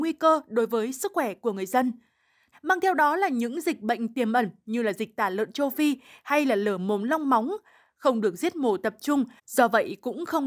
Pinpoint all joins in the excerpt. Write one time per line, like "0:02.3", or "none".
0:02.5